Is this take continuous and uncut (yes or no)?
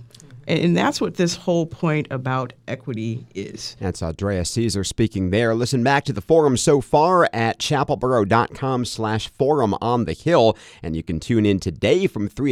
yes